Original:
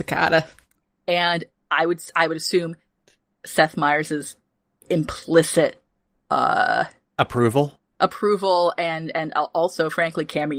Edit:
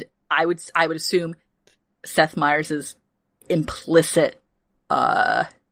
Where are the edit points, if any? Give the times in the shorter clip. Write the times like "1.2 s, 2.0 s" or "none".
none